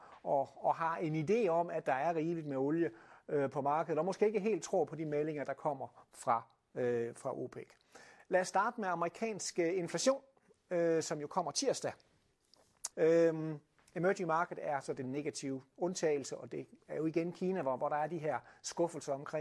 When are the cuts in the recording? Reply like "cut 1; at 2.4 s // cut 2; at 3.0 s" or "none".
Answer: cut 1; at 8.2 s // cut 2; at 12.9 s